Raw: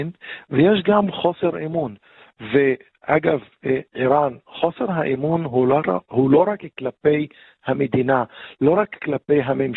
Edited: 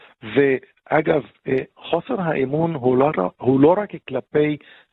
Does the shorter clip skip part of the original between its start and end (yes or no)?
yes